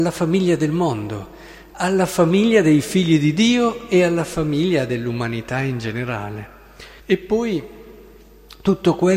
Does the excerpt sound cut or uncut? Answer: cut